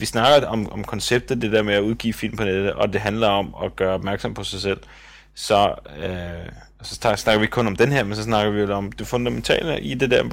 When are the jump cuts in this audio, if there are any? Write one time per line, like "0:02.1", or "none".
none